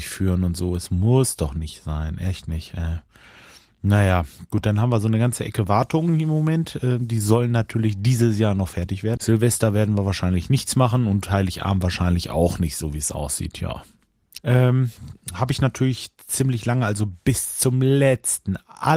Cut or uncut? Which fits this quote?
cut